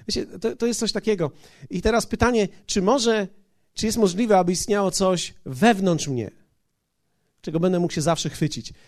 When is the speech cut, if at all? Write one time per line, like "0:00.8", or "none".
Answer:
none